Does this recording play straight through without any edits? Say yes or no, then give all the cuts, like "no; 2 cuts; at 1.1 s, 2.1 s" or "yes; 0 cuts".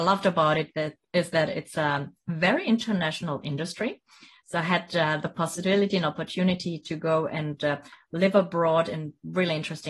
yes; 0 cuts